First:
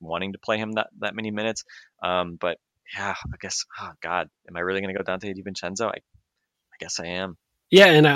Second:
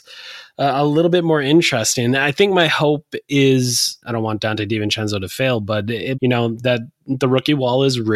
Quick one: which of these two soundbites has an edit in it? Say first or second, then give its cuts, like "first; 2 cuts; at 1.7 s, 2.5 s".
second; 2 cuts; at 4.0 s, 6.1 s